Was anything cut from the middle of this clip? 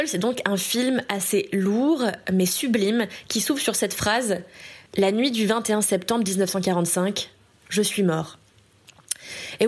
yes; 1 cut; at 4.9 s

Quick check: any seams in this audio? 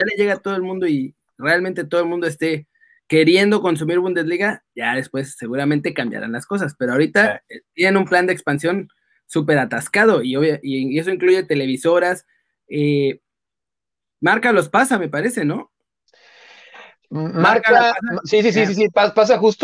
no; 0 cuts

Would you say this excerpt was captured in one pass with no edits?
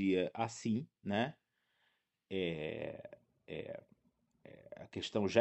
yes; 0 cuts

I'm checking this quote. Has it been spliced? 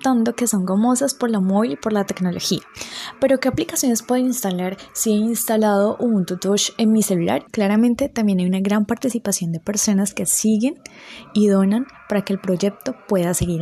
yes; 1 cut; at 7.5 s

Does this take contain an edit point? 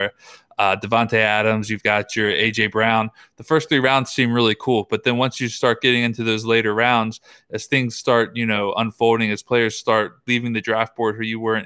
no; 0 cuts

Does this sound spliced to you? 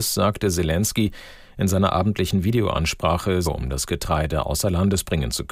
yes; 1 cut; at 3.4 s

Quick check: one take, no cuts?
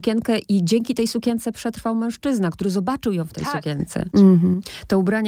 no; 1 cut; at 4.1 s

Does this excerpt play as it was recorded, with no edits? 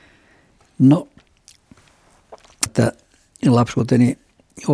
no; 1 cut; at 2.7 s

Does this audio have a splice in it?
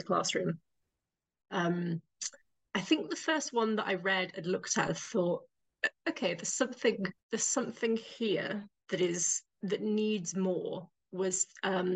yes; 3 cuts; at 1.4 s, 7.2 s, 9.6 s

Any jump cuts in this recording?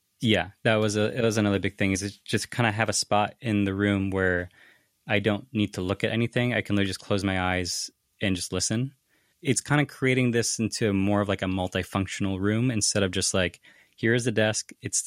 no; 0 cuts

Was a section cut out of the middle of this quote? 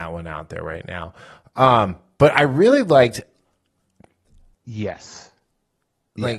yes; 1 cut; at 4.5 s

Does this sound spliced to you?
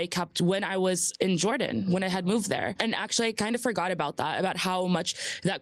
yes; 1 cut; at 2.8 s

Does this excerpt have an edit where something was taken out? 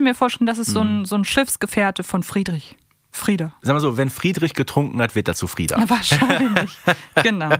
no; 0 cuts

